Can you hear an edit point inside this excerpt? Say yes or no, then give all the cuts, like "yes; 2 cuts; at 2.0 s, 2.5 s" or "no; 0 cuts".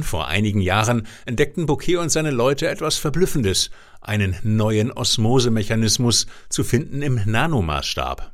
no; 0 cuts